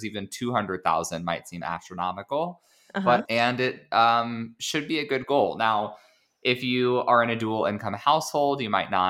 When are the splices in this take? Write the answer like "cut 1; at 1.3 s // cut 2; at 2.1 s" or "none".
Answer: cut 1; at 3.3 s